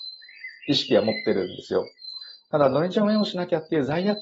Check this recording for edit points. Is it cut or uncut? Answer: uncut